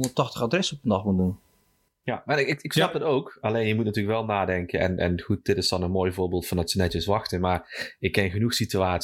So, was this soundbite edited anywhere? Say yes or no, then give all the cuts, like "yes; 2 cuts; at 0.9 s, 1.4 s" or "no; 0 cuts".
no; 0 cuts